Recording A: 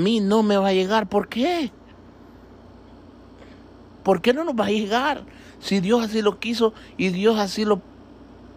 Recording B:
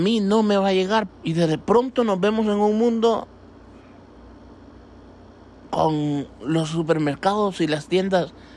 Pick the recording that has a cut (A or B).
B